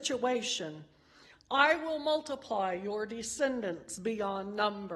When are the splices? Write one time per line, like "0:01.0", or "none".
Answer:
0:01.3